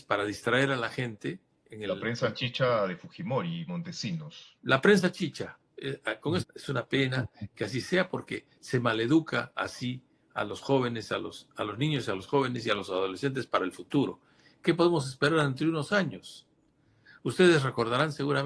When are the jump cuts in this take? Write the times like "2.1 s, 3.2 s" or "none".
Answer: 6.4 s